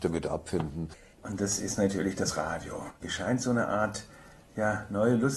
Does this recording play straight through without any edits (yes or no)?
no